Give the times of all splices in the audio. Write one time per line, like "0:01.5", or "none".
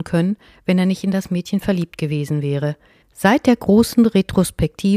0:03.0